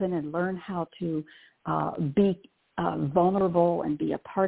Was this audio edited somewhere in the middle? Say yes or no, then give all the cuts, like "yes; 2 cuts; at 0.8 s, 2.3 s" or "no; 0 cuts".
no; 0 cuts